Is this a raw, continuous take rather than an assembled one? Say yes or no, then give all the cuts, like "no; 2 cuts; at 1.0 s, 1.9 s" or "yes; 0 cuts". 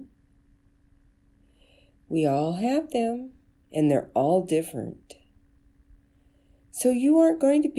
no; 1 cut; at 3.6 s